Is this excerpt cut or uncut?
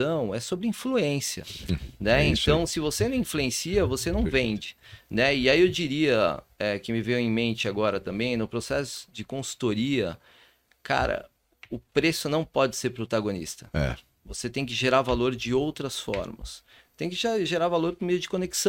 uncut